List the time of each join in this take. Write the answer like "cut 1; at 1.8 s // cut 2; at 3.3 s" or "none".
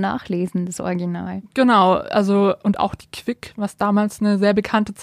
none